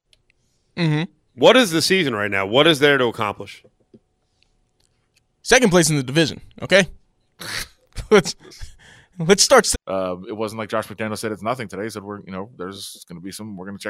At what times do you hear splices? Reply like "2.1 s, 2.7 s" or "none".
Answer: 9.7 s

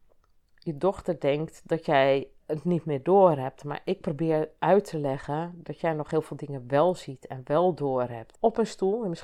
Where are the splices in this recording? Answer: 2.4 s, 8.3 s

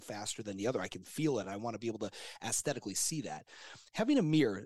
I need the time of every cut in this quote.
none

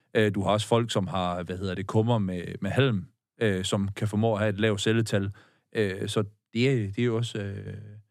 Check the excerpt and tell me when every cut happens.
none

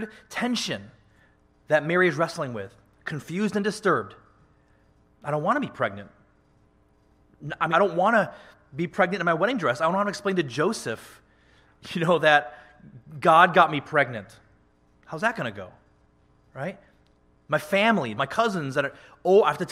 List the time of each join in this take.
7.7 s, 18.2 s

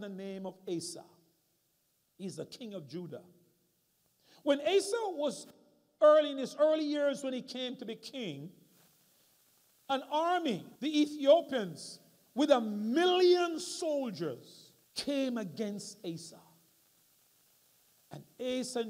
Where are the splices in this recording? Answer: 10.8 s, 14.8 s

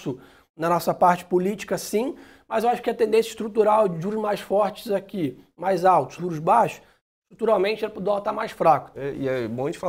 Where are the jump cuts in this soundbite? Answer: 6.2 s, 8.9 s

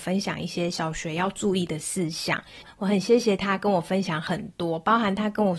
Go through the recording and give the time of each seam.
none

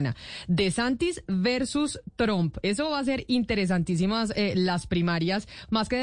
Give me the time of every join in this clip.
none

